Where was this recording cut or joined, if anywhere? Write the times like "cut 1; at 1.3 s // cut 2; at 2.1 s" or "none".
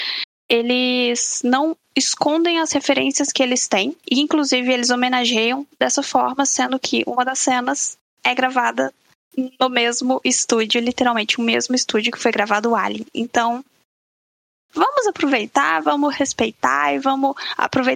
cut 1; at 4.0 s

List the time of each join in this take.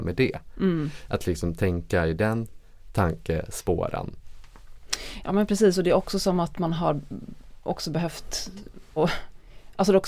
cut 1; at 9.0 s

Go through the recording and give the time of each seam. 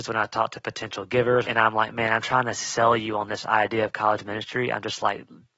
cut 1; at 1.5 s

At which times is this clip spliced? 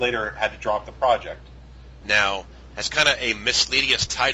cut 1; at 2.0 s

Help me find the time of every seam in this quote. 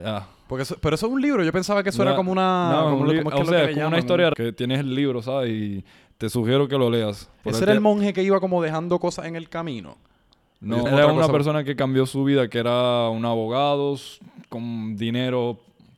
cut 1; at 4.3 s // cut 2; at 10.9 s

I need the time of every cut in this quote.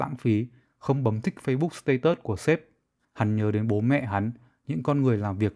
cut 1; at 3.0 s

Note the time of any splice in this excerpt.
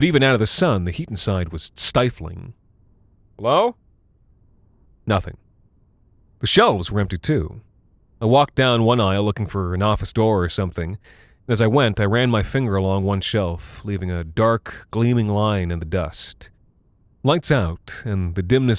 cut 1; at 3.3 s // cut 2; at 8.1 s // cut 3; at 17.1 s

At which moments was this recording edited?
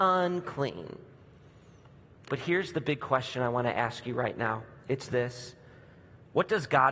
cut 1; at 2.3 s

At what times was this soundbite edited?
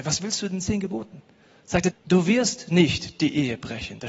cut 1; at 1.9 s

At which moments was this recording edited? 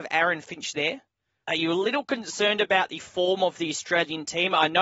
cut 1; at 1.4 s

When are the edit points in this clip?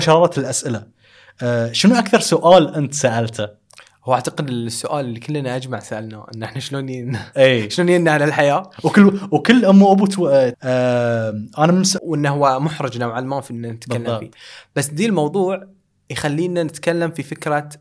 cut 1; at 10.5 s // cut 2; at 12.0 s

